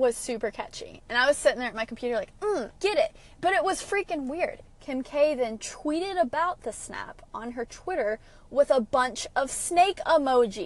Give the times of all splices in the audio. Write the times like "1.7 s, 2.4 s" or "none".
2.7 s, 4.6 s